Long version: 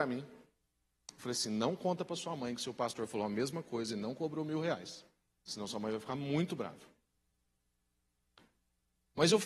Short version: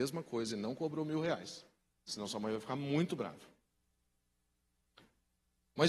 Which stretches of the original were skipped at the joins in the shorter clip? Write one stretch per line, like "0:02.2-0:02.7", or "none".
none